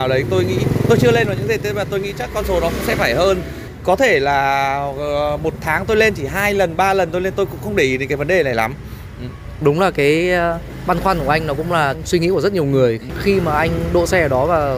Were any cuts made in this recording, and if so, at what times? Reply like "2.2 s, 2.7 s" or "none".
9.6 s